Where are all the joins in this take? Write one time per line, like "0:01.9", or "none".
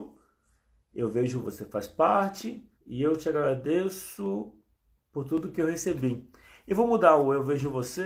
0:01.4
0:02.8